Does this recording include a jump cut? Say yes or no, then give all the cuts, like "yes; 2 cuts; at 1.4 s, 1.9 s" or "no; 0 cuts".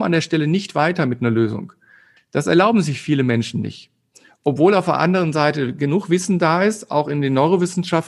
yes; 1 cut; at 2.2 s